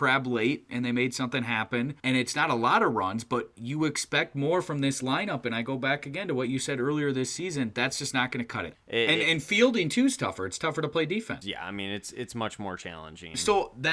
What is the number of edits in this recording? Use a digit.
3